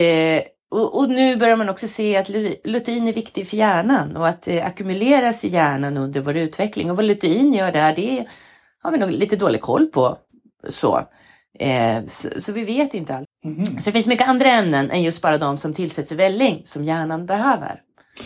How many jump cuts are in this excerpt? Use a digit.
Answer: 1